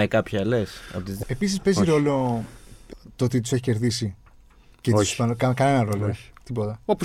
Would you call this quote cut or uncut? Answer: cut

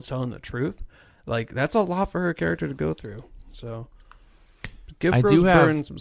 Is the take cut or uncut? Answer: uncut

